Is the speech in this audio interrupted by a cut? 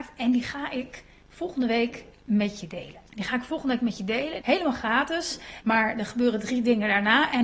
yes; 3 cuts; at 3.1 s, 4.4 s, 5.6 s

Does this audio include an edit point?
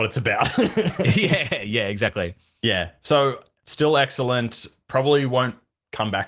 no; 0 cuts

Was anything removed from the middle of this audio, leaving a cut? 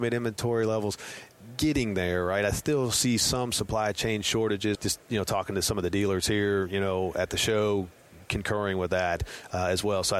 yes; 1 cut; at 4.8 s

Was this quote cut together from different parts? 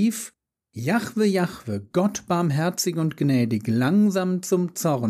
no; 0 cuts

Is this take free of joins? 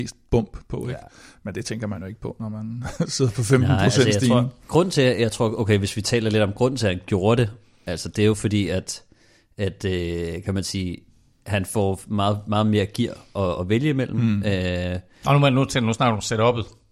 yes; 0 cuts

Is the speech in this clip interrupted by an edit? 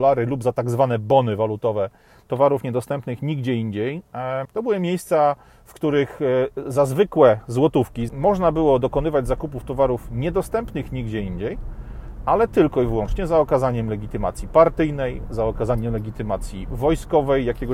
yes; 2 cuts; at 4.4 s, 8.1 s

